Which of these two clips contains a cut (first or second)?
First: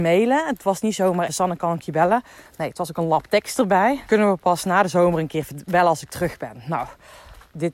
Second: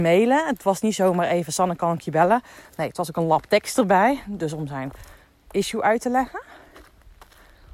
first